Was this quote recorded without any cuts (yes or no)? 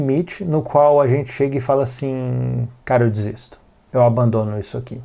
yes